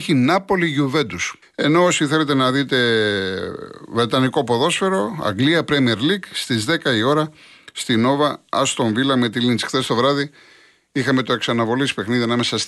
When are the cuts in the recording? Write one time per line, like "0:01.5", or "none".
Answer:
0:01.4